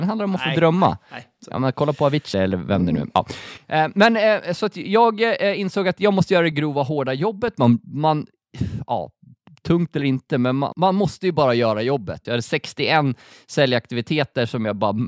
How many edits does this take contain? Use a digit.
3